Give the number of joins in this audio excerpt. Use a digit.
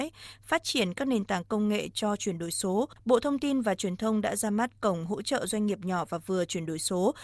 1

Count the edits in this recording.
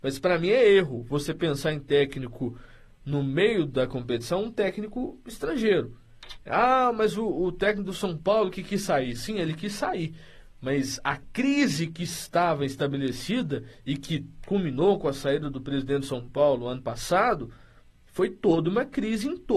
1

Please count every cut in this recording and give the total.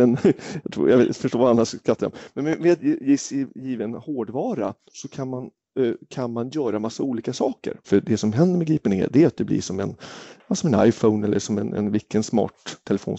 2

